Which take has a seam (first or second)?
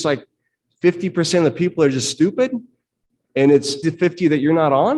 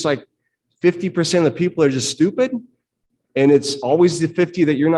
first